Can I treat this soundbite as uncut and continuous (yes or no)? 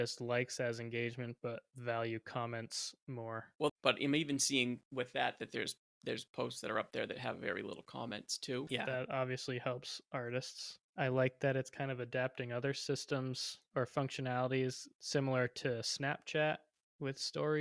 no